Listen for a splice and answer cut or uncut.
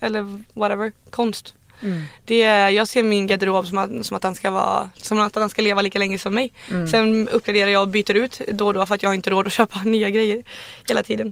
uncut